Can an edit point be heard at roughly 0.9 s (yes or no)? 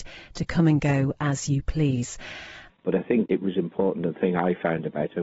no